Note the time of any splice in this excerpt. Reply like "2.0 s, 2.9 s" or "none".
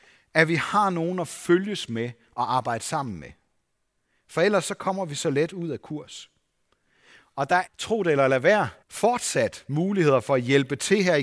7.7 s, 8.8 s